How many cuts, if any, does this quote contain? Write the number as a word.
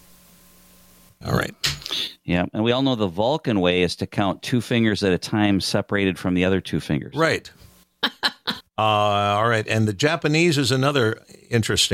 one